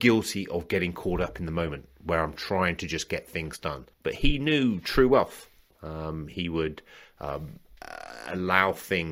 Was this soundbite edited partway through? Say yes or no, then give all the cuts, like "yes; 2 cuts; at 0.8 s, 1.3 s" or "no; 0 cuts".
yes; 1 cut; at 3.9 s